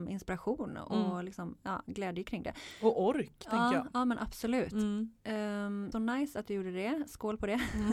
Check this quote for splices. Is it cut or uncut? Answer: cut